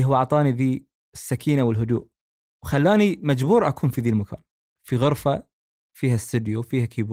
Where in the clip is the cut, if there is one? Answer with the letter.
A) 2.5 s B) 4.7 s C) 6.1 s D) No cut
D